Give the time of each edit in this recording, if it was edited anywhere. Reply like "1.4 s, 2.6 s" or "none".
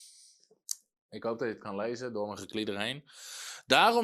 1.1 s